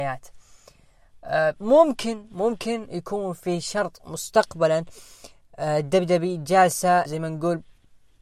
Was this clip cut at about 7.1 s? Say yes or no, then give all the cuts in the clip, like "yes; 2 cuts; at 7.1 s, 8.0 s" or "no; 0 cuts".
yes; 1 cut; at 7.1 s